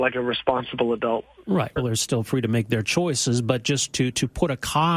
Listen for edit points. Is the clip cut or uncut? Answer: cut